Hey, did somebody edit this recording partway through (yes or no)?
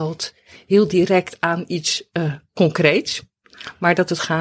no